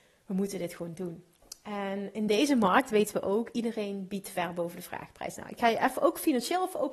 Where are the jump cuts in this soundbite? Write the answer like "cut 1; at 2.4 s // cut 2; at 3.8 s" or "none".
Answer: none